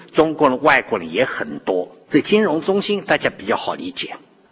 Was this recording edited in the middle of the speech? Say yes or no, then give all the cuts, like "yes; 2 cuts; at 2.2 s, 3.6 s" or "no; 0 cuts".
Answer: yes; 1 cut; at 2.0 s